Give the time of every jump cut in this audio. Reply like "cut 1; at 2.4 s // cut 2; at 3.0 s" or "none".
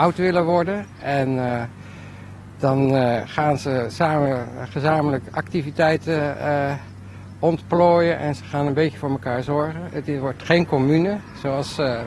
none